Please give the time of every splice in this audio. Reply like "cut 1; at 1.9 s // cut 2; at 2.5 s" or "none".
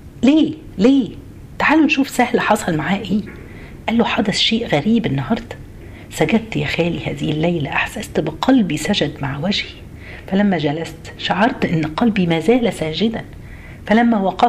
cut 1; at 3.8 s